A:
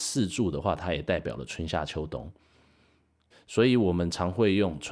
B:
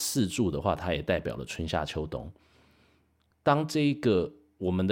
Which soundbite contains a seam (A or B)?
A